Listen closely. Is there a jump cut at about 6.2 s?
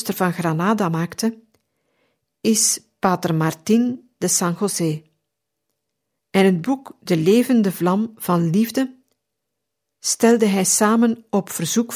yes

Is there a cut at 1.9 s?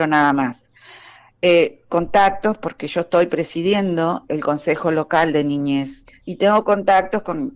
yes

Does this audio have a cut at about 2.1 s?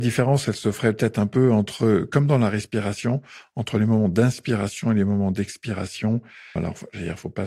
no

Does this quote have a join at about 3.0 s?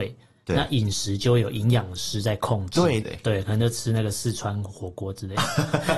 yes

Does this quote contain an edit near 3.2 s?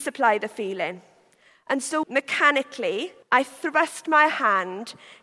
yes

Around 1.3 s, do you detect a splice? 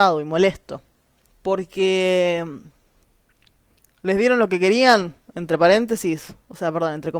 yes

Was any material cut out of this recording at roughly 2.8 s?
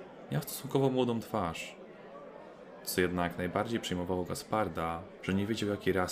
no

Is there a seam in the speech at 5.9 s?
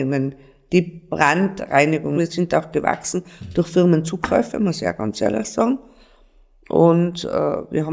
no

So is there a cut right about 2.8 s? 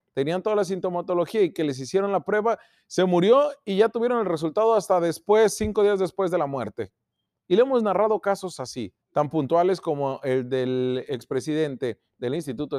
no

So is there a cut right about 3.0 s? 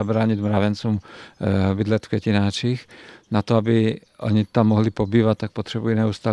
no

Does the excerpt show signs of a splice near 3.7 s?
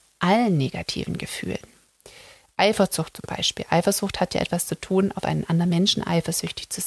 no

